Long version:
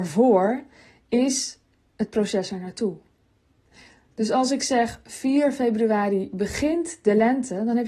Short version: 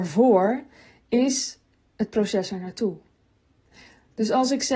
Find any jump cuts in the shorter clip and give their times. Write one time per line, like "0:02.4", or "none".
none